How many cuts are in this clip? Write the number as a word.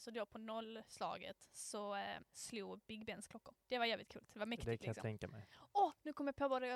two